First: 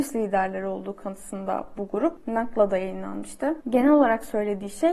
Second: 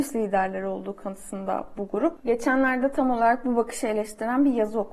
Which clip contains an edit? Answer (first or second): first